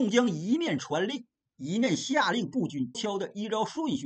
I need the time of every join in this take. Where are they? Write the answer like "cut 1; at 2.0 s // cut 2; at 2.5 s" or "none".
cut 1; at 2.9 s